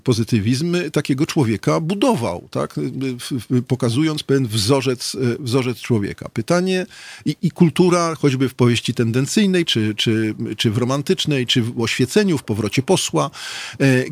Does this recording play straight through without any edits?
no; 1 cut; at 9.7 s

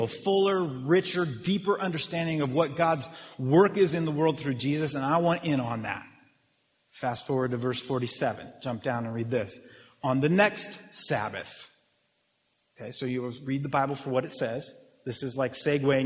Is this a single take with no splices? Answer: yes; 0 cuts

